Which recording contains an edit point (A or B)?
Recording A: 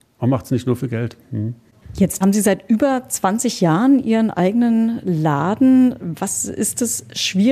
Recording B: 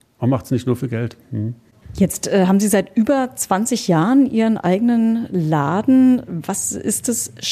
A